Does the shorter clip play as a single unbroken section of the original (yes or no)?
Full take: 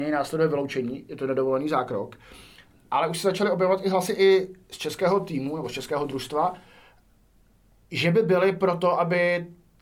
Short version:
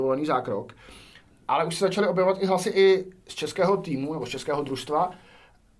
yes